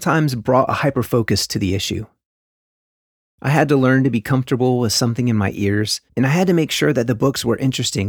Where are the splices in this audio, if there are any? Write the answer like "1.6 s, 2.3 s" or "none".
3.3 s, 6.1 s